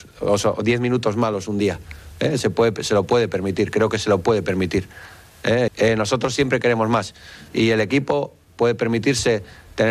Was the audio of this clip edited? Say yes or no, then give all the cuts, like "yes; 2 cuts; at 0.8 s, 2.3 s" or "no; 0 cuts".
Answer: yes; 2 cuts; at 5.7 s, 7.5 s